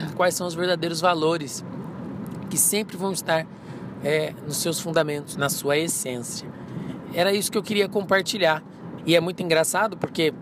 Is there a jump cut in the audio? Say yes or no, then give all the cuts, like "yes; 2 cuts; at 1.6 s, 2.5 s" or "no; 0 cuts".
yes; 2 cuts; at 5.3 s, 9.0 s